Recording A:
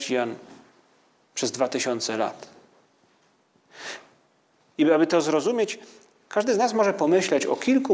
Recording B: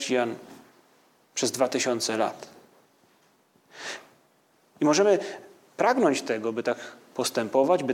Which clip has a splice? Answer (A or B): A